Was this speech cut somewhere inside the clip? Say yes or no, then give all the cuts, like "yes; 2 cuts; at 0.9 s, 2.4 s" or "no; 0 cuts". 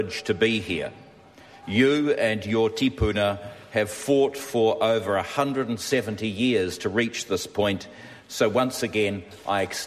no; 0 cuts